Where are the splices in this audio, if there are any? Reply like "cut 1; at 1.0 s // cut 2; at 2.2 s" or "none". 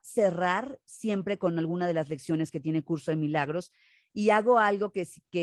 none